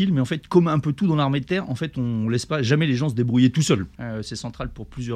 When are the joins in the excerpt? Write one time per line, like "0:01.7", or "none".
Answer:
0:03.9